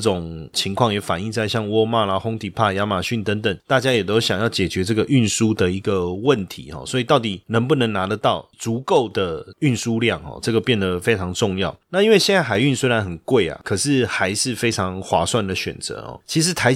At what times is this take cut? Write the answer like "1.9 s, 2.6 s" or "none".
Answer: none